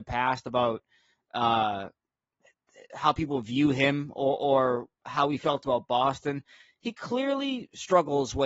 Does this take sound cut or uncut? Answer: uncut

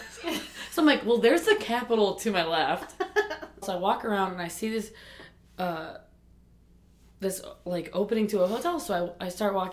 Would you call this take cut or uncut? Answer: cut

